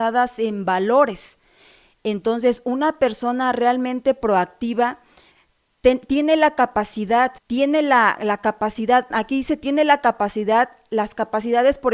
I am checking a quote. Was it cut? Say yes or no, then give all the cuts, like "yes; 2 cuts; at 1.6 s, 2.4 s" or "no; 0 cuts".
yes; 2 cuts; at 7.4 s, 9.1 s